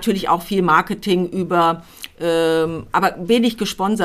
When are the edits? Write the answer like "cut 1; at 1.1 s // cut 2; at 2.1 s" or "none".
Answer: none